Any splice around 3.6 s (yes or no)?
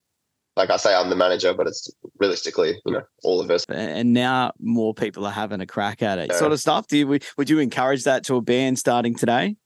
yes